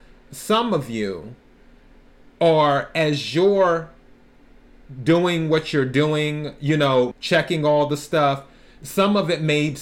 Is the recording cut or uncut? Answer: cut